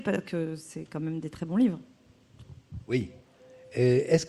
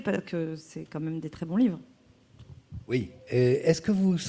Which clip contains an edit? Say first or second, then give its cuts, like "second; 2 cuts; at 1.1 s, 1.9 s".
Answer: second; 1 cut; at 3.2 s